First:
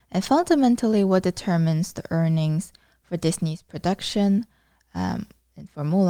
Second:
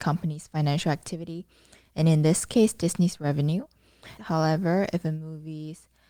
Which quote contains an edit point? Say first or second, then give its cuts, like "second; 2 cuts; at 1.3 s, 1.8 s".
second; 1 cut; at 4.2 s